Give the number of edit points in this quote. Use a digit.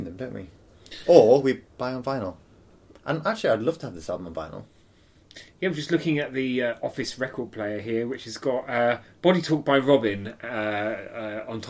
0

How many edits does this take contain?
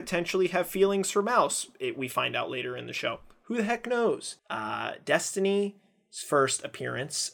1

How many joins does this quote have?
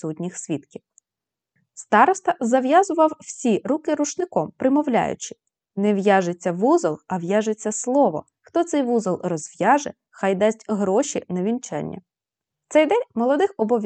1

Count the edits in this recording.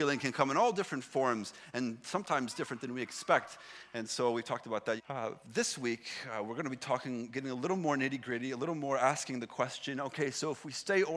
1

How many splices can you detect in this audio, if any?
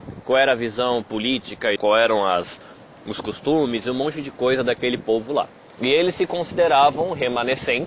2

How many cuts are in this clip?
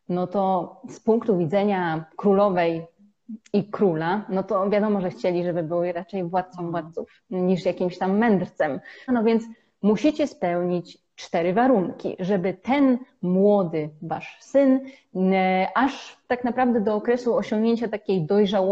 1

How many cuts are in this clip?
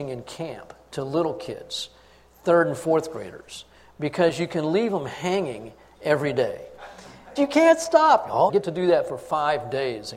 2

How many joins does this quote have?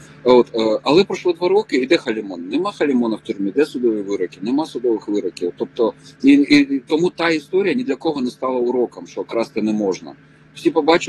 0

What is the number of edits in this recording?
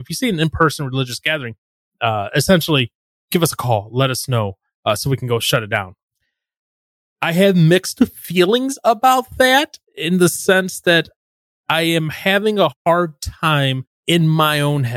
0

